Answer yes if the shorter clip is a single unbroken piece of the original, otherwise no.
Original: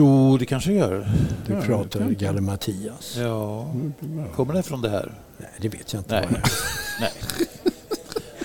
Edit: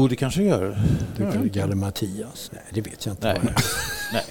no